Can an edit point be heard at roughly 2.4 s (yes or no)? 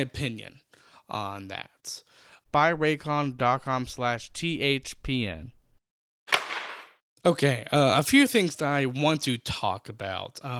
yes